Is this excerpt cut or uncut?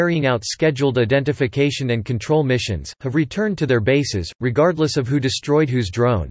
uncut